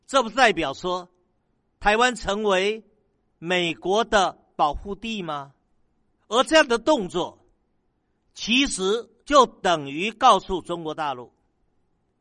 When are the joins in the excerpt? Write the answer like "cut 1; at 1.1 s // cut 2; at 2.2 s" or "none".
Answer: cut 1; at 6.2 s // cut 2; at 9.2 s